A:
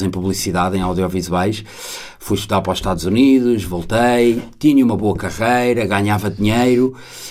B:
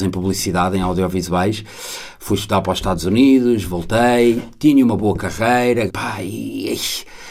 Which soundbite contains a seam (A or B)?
B